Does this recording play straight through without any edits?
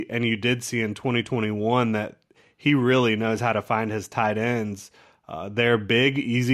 yes; 0 cuts

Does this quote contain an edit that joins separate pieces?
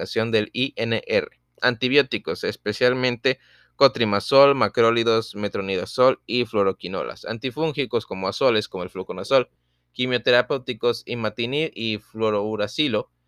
no; 0 cuts

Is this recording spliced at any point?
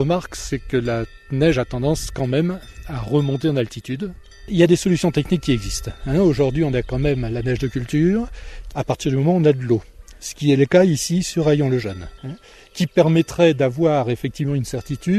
no; 0 cuts

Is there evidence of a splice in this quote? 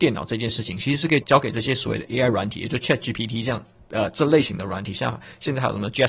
yes; 1 cut; at 1.2 s

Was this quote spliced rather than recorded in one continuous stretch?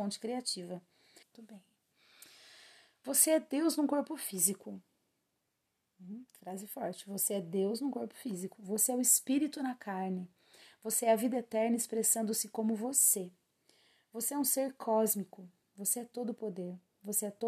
yes; 1 cut; at 1.2 s

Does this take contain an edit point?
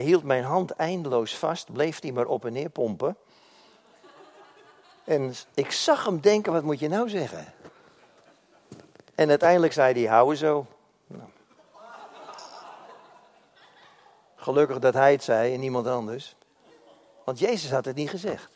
no; 0 cuts

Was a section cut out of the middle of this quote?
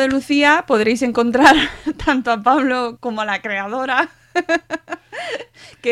yes; 1 cut; at 3.0 s

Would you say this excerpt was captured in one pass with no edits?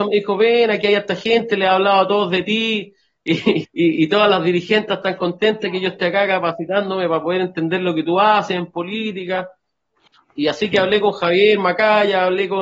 no; 1 cut; at 3.6 s

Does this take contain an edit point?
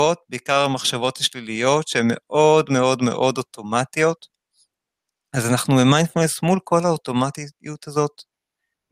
no; 0 cuts

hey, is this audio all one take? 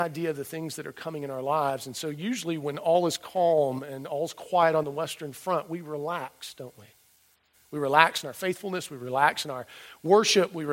yes; 0 cuts

